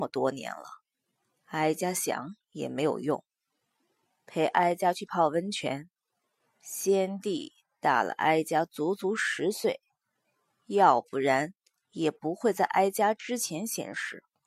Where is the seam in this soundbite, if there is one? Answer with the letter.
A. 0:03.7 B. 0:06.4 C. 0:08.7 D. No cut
B